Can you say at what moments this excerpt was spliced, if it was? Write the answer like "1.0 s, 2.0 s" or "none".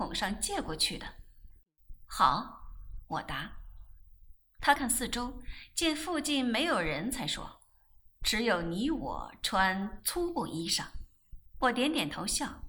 4.8 s